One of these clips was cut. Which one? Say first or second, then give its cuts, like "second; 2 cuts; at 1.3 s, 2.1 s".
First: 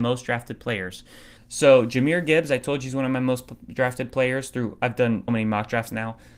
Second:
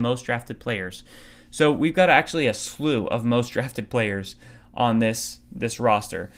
first; 2 cuts; at 1.4 s, 5.3 s